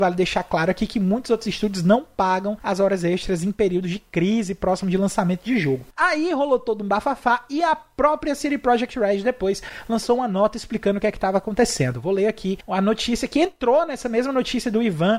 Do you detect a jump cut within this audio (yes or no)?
no